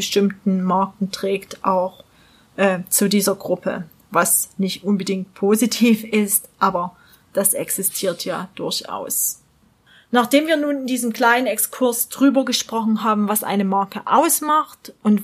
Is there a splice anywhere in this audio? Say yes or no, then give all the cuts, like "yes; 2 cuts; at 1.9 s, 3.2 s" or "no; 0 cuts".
no; 0 cuts